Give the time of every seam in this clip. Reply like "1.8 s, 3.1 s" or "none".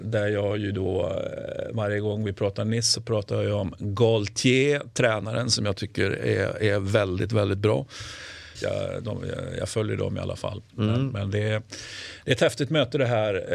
8.6 s